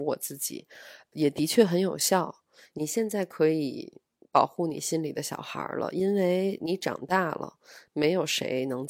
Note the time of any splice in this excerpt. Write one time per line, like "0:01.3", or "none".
0:02.7